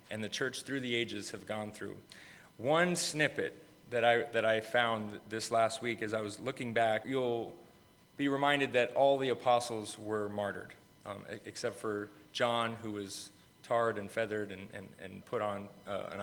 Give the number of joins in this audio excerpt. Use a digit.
2